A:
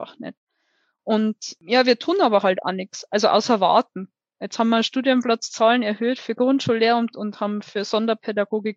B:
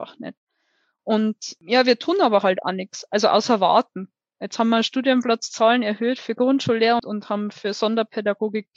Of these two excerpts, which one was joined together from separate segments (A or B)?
B